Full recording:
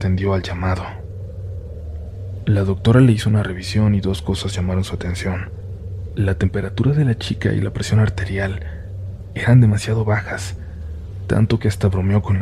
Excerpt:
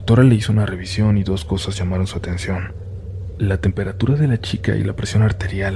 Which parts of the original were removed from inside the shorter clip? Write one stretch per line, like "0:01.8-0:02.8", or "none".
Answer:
none